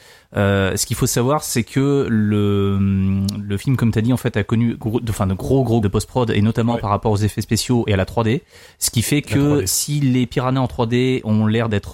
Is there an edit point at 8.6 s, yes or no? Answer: no